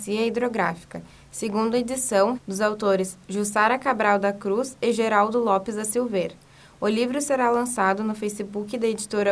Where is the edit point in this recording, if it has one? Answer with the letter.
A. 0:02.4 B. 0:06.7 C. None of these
A